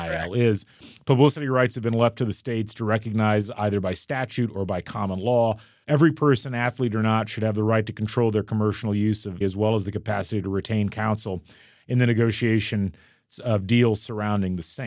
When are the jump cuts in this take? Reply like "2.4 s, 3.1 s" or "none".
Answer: 5.8 s, 9.4 s